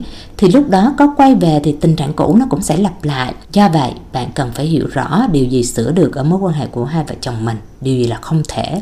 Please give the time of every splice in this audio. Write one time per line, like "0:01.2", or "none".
0:03.4